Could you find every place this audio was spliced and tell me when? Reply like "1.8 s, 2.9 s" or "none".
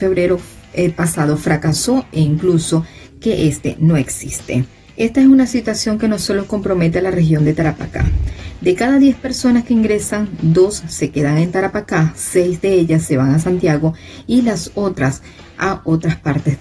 none